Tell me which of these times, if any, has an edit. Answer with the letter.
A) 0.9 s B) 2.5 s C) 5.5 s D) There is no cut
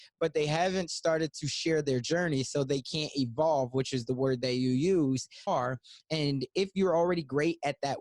C